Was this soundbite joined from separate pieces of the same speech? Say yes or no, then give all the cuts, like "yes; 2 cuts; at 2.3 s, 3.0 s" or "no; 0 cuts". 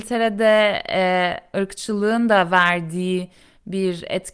yes; 1 cut; at 1.5 s